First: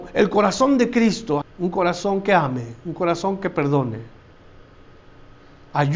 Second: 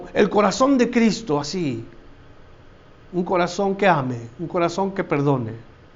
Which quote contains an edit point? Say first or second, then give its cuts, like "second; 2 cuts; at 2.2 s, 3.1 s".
first; 1 cut; at 1.4 s